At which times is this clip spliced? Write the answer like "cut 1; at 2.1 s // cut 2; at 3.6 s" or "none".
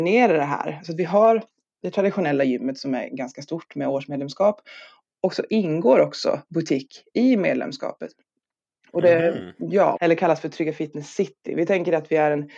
cut 1; at 10.0 s